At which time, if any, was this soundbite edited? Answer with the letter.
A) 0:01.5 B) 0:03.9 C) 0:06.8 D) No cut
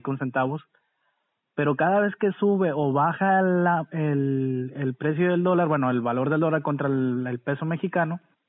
D